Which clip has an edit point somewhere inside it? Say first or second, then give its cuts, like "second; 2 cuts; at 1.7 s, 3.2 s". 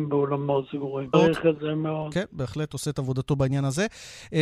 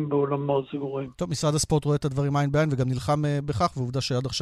first; 1 cut; at 1.1 s